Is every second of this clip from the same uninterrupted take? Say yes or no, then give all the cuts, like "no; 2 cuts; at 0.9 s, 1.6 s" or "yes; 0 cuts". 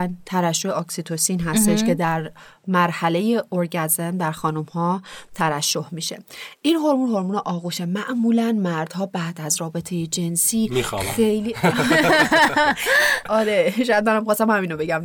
yes; 0 cuts